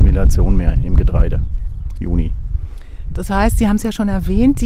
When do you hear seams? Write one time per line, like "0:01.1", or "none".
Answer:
0:02.0

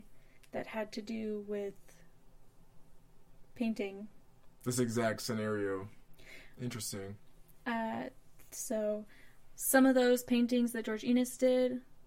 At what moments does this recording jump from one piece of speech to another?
none

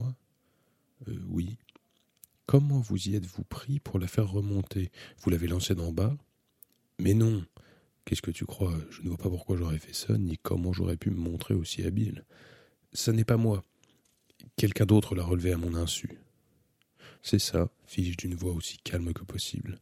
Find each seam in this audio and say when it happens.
0:17.2

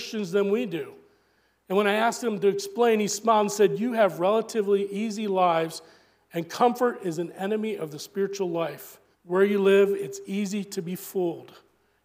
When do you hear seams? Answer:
0:09.1

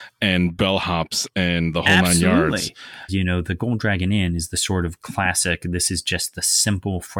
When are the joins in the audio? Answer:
0:03.1

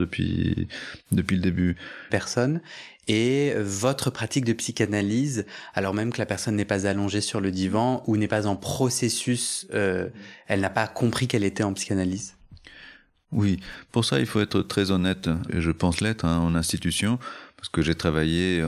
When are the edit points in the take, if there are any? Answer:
0:02.1
0:15.5

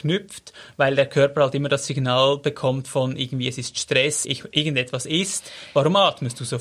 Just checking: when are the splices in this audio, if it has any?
0:04.2

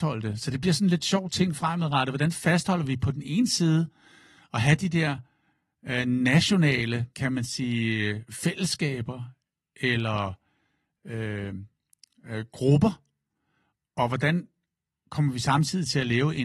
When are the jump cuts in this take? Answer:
0:07.1

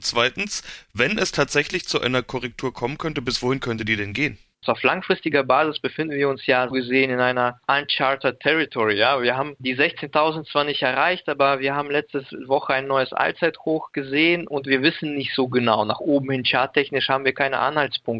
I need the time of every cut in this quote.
0:04.6
0:06.7

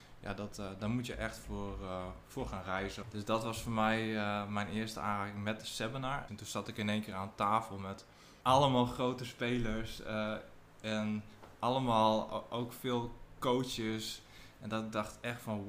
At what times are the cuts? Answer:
0:03.0
0:06.3
0:08.4

